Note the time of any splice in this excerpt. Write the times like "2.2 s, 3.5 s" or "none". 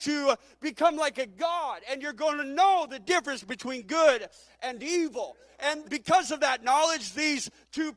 5.8 s